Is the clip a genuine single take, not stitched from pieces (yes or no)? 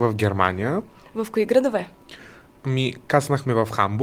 yes